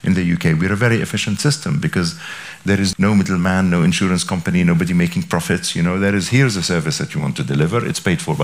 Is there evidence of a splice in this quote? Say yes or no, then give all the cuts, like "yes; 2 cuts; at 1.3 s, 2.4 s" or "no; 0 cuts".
no; 0 cuts